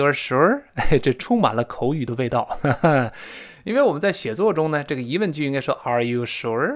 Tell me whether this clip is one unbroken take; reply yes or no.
yes